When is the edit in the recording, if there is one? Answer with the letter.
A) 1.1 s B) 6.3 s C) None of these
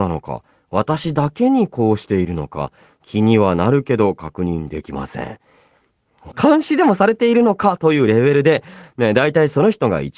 B